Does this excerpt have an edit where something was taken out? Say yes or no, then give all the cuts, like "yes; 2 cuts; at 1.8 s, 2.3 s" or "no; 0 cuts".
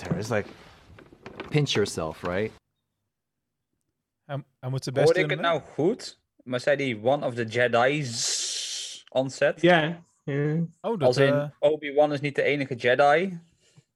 yes; 1 cut; at 1.5 s